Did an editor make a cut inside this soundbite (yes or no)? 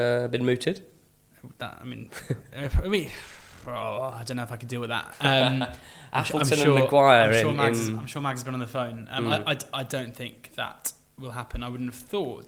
no